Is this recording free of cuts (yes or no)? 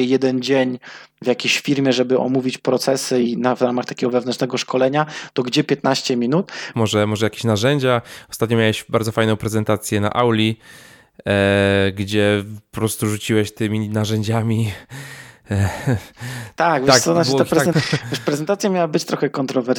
no